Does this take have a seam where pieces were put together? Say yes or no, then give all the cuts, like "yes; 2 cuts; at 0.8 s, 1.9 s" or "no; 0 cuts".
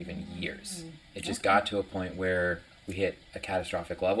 no; 0 cuts